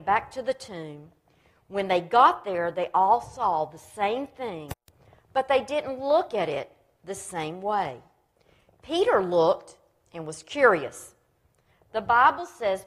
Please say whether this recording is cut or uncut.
uncut